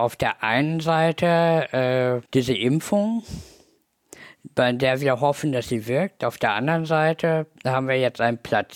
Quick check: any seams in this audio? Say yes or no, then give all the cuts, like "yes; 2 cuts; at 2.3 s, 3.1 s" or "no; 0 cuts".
yes; 1 cut; at 2.2 s